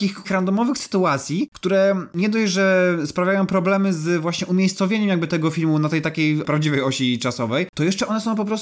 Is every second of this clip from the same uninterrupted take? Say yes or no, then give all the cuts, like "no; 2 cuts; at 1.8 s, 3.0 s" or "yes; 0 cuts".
yes; 0 cuts